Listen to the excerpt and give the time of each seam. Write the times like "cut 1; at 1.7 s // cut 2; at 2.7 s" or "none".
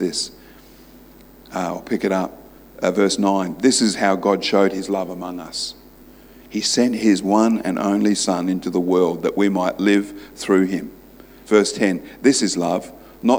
none